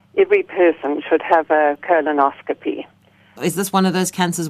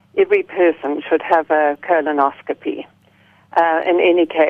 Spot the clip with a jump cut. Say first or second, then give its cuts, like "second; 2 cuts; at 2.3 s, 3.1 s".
first; 1 cut; at 3.4 s